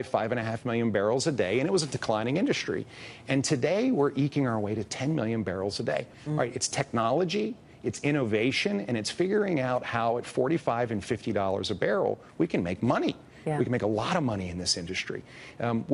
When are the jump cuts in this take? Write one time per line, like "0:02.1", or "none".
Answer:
0:06.1